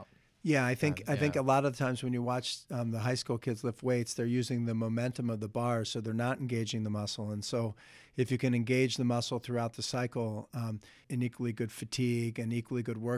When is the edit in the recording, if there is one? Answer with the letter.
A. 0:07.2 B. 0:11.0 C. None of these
B